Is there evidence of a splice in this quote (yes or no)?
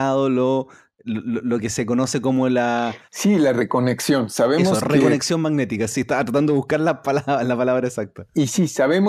no